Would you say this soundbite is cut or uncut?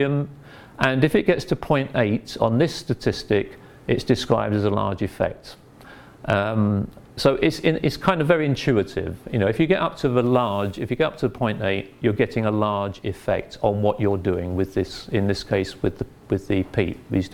uncut